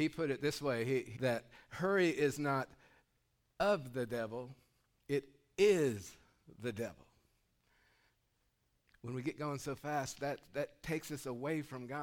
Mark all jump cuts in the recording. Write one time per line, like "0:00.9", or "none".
0:01.2